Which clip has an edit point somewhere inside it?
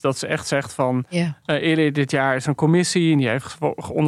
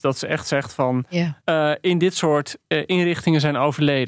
second; 1 cut; at 1.4 s

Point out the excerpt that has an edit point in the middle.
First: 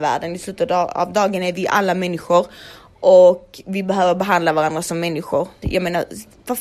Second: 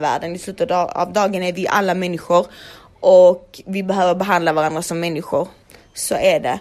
first; 1 cut; at 5.6 s

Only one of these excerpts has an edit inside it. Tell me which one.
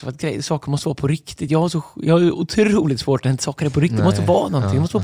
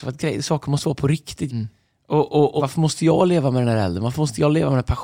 second; 2 cuts; at 1.5 s, 2.6 s

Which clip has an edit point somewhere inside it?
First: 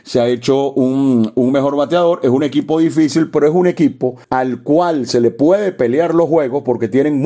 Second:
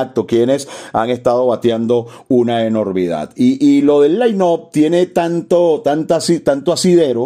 first; 1 cut; at 4.2 s

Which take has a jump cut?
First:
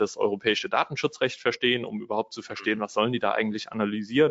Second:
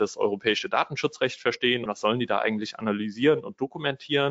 second; 1 cut; at 1.9 s

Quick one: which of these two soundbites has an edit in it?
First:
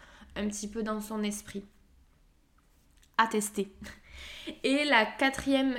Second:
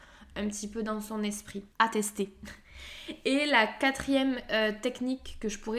second; 1 cut; at 1.7 s

